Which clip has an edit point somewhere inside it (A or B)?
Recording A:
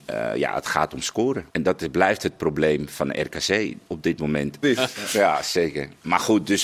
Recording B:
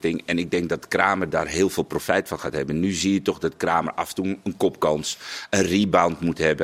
A